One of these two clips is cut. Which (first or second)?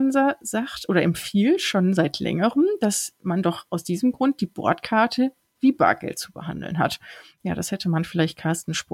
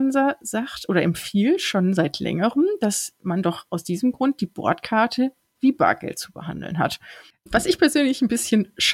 second